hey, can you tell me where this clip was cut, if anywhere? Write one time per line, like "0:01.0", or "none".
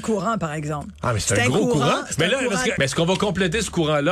0:02.8